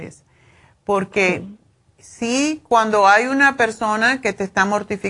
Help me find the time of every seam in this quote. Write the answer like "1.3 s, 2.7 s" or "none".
none

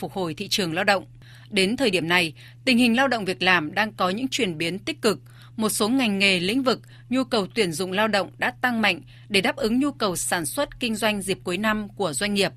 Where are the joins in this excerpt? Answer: none

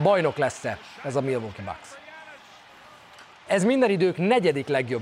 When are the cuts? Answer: 3.5 s

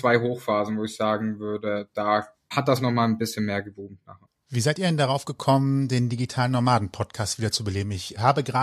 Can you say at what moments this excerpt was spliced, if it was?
none

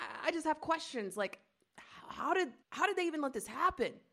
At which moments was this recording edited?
2.6 s

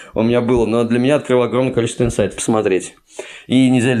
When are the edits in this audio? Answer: 2.4 s

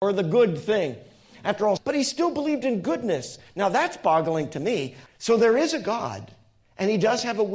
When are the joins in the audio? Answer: 1.8 s, 5.1 s

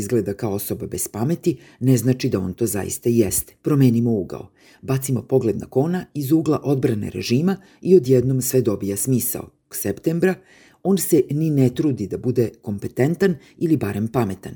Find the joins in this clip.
3.6 s, 9.7 s

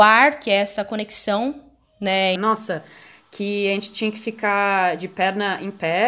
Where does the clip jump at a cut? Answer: 2.4 s

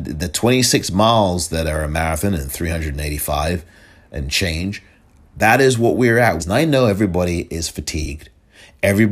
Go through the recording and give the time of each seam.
6.4 s

